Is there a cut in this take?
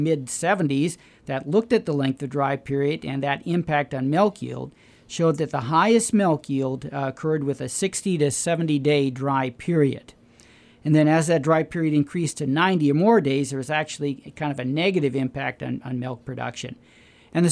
no; 0 cuts

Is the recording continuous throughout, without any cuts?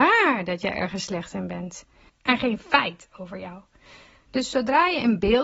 no; 2 cuts; at 2.1 s, 4.3 s

